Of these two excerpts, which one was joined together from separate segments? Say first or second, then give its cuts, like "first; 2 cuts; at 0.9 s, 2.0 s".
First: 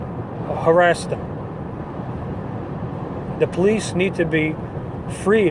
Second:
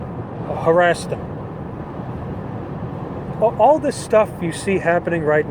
second; 1 cut; at 3.3 s